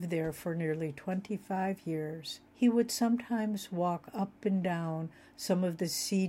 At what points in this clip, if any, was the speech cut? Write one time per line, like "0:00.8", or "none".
0:02.5